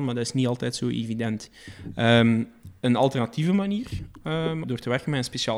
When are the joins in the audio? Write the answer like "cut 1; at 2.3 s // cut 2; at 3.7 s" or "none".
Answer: cut 1; at 4.6 s